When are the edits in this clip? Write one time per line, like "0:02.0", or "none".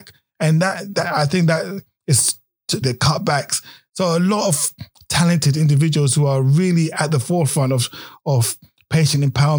0:02.8